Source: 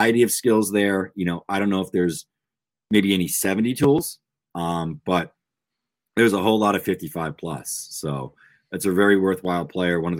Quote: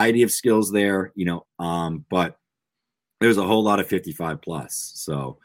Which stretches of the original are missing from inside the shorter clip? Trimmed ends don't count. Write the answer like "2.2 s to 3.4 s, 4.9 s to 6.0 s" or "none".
1.5 s to 4.4 s